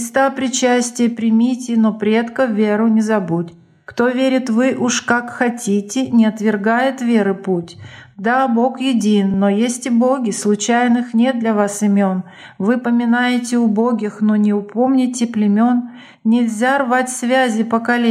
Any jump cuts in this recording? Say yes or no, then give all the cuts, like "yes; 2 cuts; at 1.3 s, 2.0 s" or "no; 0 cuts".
no; 0 cuts